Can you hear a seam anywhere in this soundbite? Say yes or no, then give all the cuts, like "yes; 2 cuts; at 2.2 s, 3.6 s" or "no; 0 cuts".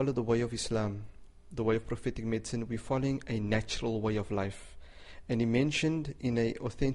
no; 0 cuts